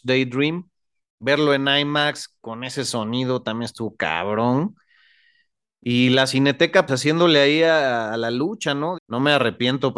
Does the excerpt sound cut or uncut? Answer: cut